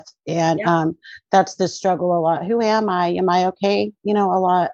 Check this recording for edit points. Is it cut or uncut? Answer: uncut